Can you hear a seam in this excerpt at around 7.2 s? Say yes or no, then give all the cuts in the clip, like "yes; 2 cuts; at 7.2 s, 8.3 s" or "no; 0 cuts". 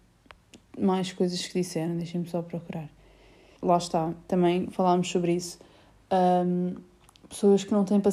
no; 1 cut; at 3.6 s